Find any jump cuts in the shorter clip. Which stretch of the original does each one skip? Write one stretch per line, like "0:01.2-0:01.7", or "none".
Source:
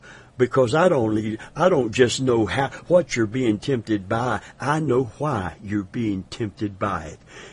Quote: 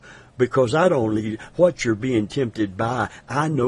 0:01.5-0:02.8